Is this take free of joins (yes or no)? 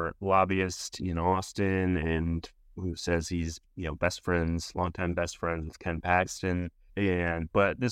no